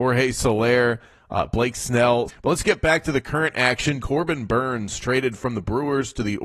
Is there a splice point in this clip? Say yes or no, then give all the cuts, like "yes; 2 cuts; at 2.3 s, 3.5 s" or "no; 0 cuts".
yes; 2 cuts; at 2.3 s, 4.0 s